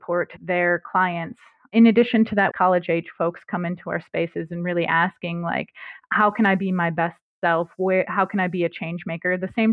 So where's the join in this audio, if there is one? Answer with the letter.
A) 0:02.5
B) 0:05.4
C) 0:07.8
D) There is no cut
A